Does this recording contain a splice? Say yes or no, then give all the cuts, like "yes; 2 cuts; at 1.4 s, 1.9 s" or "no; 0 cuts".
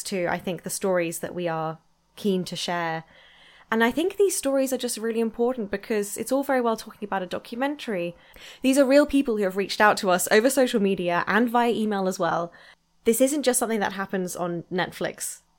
no; 0 cuts